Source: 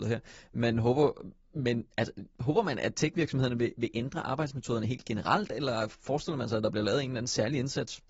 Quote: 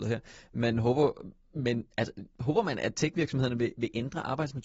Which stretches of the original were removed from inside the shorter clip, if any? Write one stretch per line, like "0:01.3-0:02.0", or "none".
none